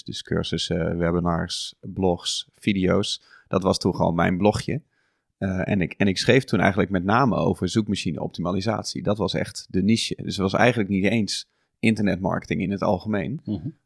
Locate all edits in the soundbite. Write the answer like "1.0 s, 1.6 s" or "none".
none